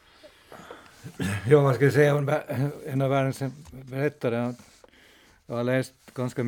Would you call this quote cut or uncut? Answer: uncut